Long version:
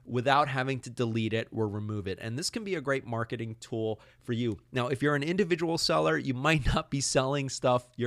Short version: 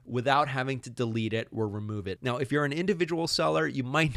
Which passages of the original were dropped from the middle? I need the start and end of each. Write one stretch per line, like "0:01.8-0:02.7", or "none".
0:02.2-0:04.7